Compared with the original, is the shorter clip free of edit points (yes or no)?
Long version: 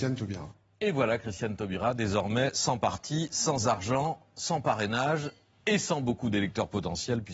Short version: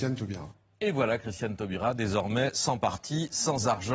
yes